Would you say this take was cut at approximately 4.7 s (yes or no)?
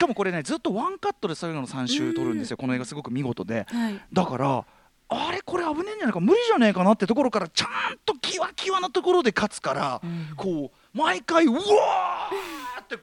no